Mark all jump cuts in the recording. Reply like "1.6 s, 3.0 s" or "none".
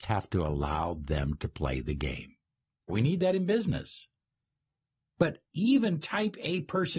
2.9 s